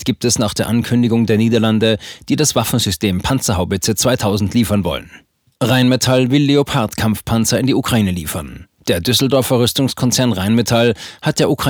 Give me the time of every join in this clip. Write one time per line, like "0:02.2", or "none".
none